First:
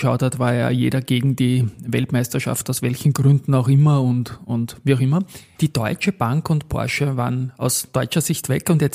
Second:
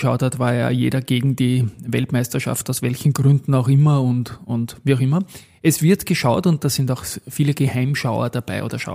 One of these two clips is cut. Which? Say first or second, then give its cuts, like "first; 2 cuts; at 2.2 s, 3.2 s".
first; 1 cut; at 5.6 s